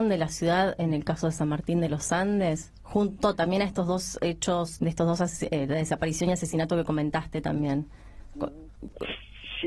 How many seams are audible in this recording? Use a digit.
1